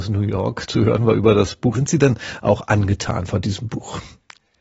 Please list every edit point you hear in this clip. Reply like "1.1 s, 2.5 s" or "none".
1.7 s